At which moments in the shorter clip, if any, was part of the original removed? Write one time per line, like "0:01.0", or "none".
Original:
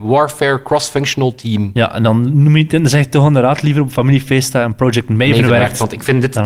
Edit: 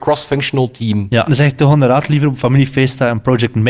0:01.3